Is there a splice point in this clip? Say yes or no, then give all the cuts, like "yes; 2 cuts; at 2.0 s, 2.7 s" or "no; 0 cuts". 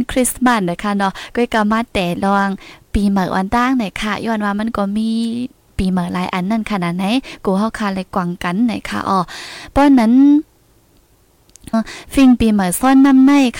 yes; 1 cut; at 11.7 s